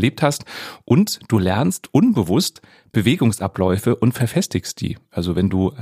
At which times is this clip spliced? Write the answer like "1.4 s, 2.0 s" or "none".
none